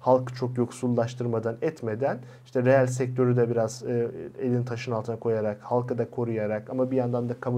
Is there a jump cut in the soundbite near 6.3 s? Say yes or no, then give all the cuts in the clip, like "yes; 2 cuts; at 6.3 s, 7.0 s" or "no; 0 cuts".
no; 0 cuts